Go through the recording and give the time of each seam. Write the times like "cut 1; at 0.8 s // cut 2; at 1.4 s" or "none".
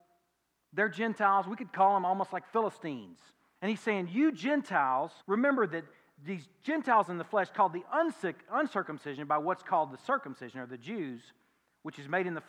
cut 1; at 3.6 s // cut 2; at 5.2 s